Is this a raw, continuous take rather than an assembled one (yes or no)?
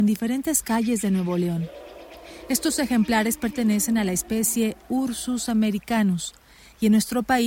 yes